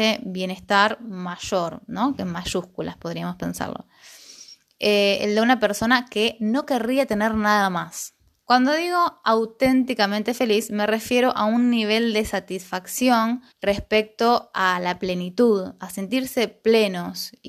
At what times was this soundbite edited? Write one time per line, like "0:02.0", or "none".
0:08.4
0:13.5